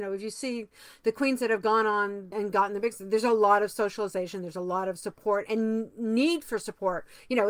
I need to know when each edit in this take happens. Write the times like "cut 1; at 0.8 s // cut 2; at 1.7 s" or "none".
cut 1; at 2.3 s // cut 2; at 5.5 s